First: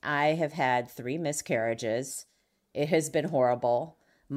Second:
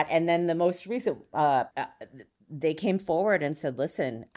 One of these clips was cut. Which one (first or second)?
second